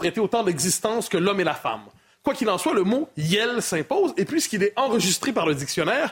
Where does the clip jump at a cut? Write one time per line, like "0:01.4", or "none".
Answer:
none